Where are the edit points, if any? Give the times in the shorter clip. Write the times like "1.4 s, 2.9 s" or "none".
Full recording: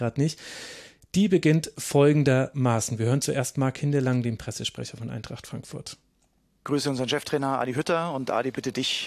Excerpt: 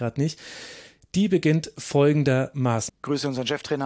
2.9 s